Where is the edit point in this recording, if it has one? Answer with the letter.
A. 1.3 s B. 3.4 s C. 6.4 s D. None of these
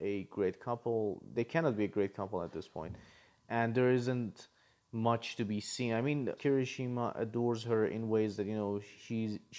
C